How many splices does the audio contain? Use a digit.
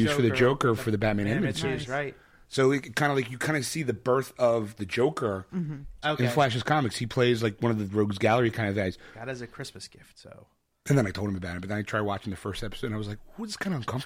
2